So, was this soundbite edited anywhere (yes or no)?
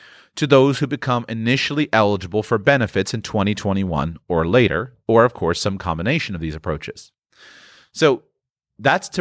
no